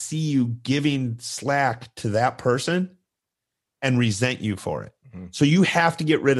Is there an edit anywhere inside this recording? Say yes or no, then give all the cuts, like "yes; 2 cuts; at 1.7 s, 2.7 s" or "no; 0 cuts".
no; 0 cuts